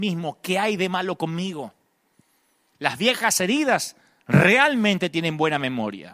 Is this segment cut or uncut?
uncut